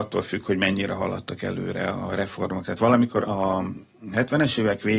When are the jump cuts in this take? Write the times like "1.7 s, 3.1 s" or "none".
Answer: 3.2 s

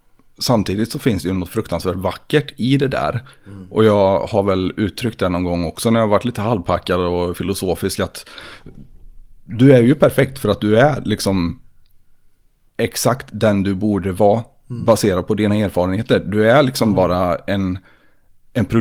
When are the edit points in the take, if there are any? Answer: none

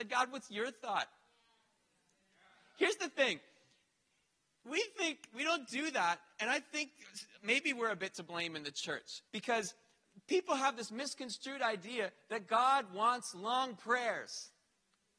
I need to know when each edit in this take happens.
7.4 s, 9.3 s

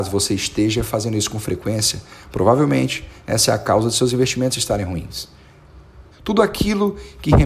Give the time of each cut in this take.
6.1 s

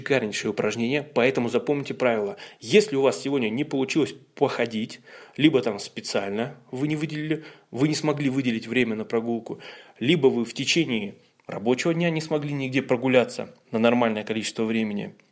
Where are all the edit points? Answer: none

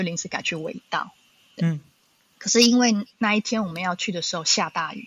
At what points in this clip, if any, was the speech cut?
1.6 s, 3.1 s

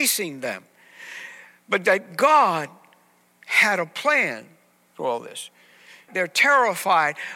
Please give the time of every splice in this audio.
6.1 s

